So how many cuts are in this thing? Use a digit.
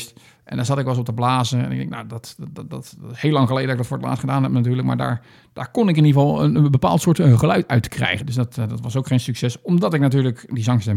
1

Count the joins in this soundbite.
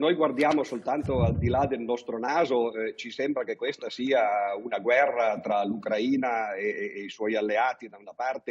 0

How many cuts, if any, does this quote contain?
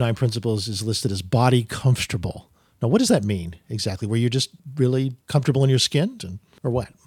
1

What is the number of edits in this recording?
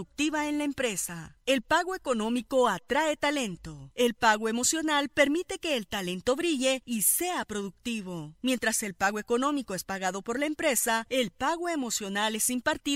0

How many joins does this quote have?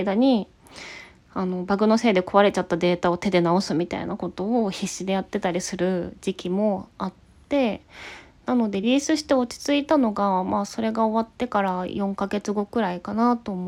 1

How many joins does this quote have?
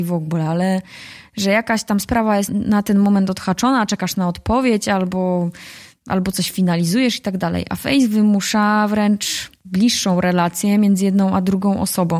1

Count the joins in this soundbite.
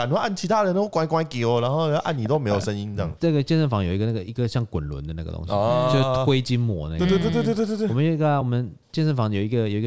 0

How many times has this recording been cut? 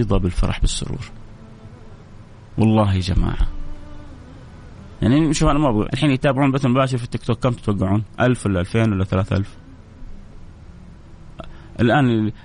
1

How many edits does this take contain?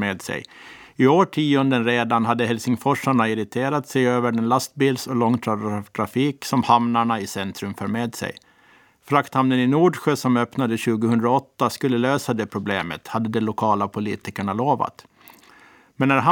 0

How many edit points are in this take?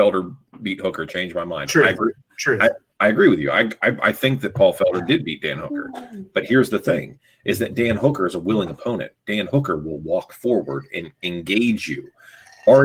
0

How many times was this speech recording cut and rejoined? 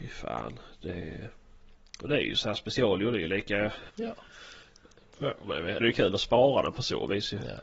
2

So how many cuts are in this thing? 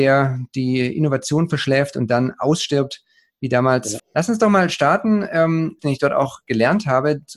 2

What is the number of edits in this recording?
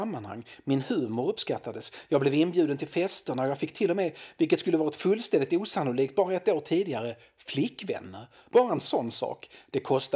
0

